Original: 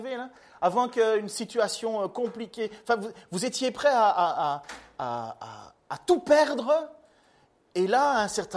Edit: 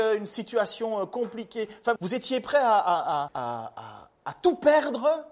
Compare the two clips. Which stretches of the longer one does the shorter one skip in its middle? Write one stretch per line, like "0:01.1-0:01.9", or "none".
0:03.0-0:03.3
0:04.6-0:04.9